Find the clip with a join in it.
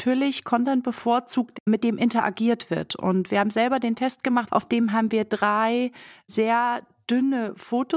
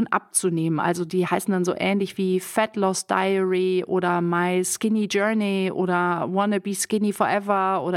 first; 1 cut; at 4.5 s

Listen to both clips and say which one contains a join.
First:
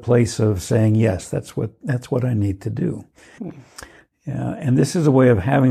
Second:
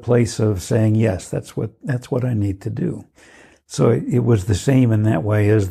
first; 1 cut; at 3.4 s

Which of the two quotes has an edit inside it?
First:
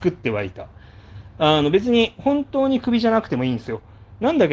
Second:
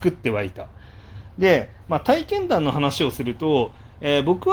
second; 1 cut; at 1.3 s

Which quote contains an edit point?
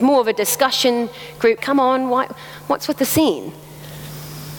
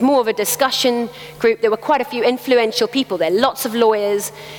first; 1 cut; at 1.6 s

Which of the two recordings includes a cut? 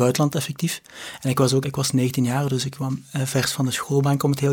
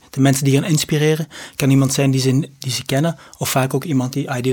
first; 1 cut; at 1.6 s

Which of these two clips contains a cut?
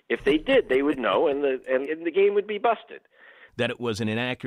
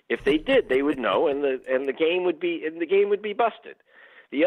first; 2 cuts; at 1.8 s, 3.5 s

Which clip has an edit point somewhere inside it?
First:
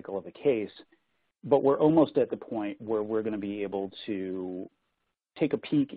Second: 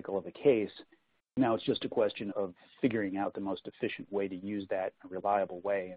second; 2 cuts; at 1.2 s, 2.3 s

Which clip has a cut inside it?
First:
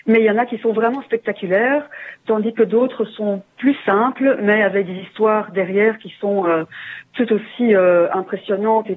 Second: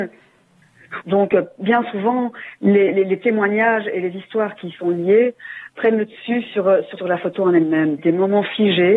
second; 3 cuts; at 1.0 s, 7.0 s, 8.0 s

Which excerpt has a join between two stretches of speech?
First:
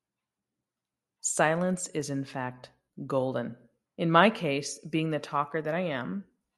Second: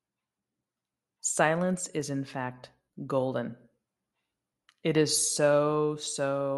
first; 1 cut; at 3.9 s

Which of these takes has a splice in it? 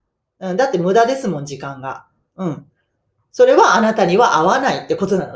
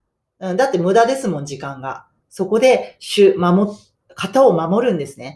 second; 1 cut; at 2.2 s

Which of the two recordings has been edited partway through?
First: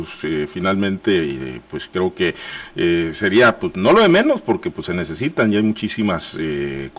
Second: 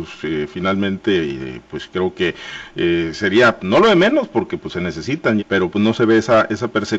second; 2 cuts; at 3.6 s, 5.4 s

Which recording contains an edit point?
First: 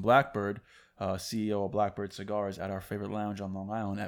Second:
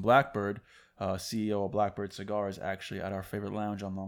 first; 1 cut; at 2.6 s

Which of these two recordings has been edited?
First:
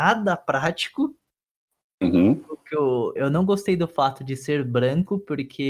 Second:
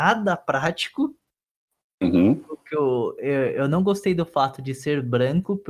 first; 1 cut; at 3.2 s

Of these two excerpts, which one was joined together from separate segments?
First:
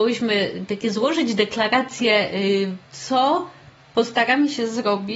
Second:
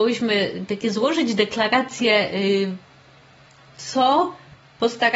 first; 1 cut; at 2.9 s

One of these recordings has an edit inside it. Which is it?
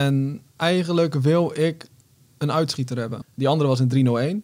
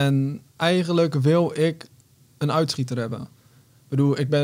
first; 1 cut; at 3.2 s

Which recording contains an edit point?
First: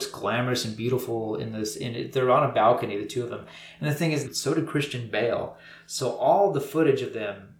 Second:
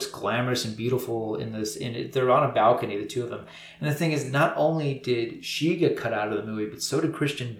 first; 1 cut; at 4.2 s

